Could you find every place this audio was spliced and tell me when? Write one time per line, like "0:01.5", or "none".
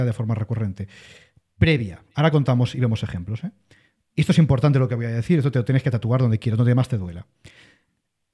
none

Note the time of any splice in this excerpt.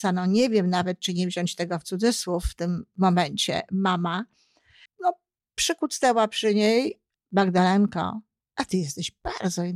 0:04.9
0:07.1
0:08.4

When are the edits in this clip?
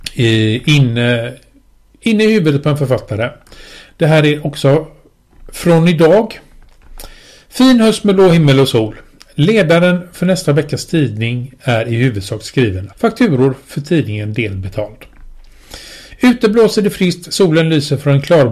0:12.9

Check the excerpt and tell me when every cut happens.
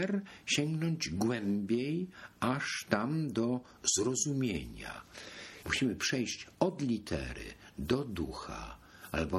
0:05.6

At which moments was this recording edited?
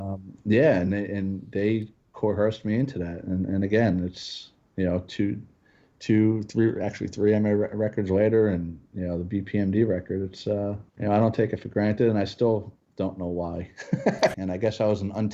0:10.9
0:14.3

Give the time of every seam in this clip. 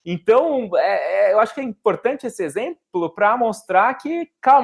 none

